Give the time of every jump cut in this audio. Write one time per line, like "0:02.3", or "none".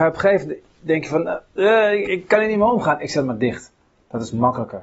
0:02.0